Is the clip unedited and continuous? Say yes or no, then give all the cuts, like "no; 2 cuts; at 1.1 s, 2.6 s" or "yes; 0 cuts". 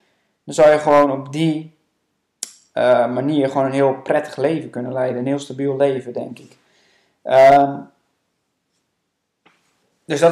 yes; 0 cuts